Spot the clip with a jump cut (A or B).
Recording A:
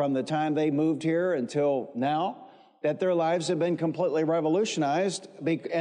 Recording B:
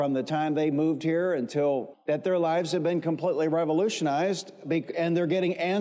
B